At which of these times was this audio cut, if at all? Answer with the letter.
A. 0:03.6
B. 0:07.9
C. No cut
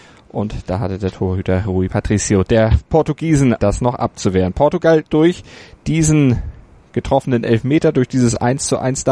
A